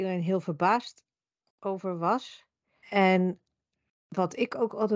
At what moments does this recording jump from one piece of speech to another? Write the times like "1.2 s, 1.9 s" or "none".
2.8 s